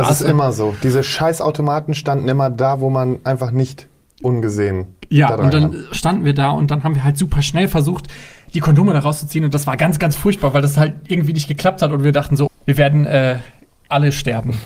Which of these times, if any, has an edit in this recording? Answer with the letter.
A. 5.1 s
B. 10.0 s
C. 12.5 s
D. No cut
C